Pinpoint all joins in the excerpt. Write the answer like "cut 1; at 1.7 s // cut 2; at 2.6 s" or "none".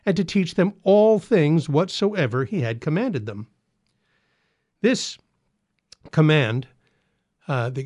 none

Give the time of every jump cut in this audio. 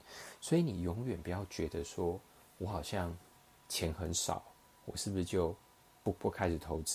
none

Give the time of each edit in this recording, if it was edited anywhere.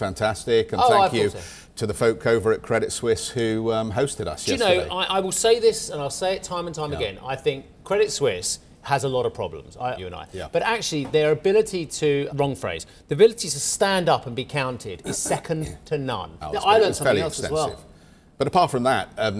cut 1; at 10.0 s // cut 2; at 12.3 s // cut 3; at 16.4 s

